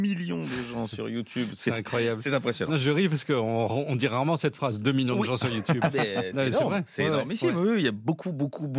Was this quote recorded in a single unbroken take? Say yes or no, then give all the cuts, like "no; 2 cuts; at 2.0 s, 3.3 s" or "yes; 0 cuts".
yes; 0 cuts